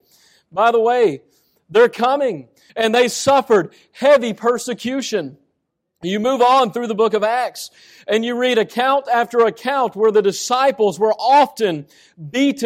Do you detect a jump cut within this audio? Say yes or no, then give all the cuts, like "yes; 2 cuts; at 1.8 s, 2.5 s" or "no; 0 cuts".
yes; 1 cut; at 2.7 s